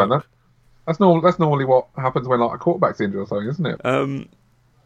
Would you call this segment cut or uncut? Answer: cut